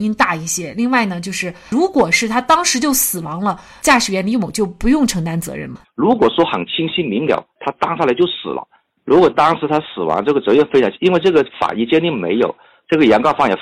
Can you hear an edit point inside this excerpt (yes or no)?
yes